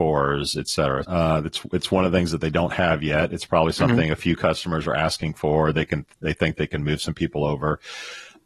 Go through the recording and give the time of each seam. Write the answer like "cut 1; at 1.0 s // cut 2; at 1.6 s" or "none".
cut 1; at 1.0 s